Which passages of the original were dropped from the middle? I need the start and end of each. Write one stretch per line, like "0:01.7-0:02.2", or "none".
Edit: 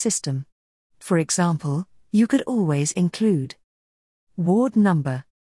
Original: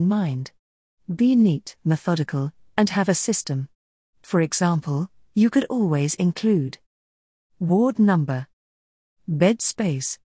none